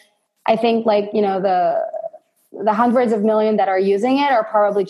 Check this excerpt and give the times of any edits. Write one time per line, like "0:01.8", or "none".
none